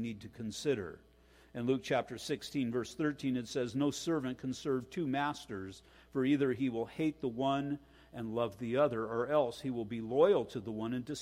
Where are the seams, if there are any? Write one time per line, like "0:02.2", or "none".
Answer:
none